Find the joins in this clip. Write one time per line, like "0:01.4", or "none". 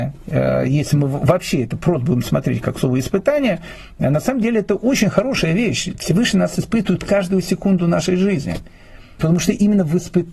0:09.2